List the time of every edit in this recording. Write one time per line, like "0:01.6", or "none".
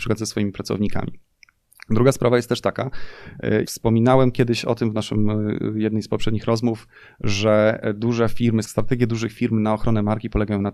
0:03.6
0:08.6

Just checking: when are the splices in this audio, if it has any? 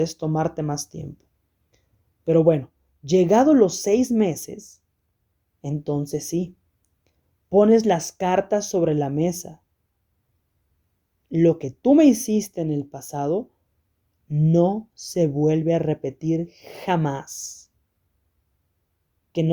none

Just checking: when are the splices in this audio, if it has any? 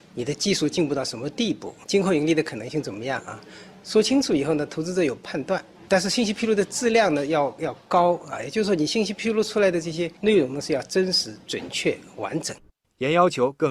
0:01.8

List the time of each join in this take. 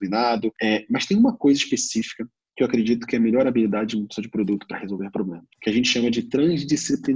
none

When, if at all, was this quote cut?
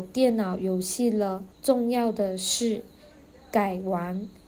0:01.5

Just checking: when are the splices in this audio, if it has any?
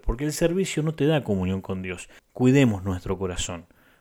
0:02.2

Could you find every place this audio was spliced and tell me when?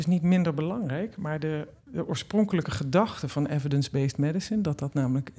0:01.9

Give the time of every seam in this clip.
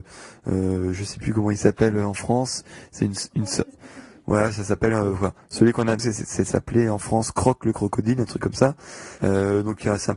0:06.0
0:09.2

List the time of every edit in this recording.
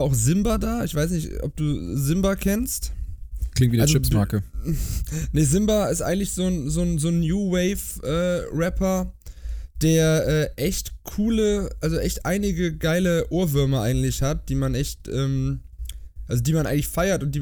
0:03.5

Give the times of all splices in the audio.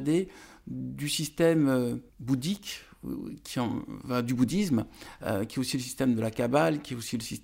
0:02.1

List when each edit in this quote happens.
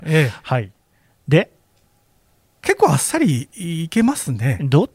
none

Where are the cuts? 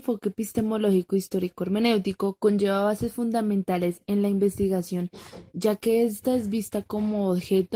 0:05.5

